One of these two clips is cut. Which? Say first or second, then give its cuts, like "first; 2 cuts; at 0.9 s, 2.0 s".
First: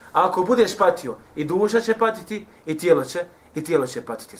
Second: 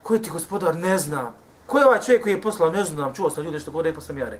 second; 1 cut; at 1.7 s